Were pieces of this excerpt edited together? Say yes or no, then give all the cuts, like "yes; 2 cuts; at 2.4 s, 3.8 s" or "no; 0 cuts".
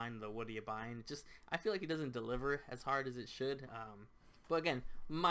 no; 0 cuts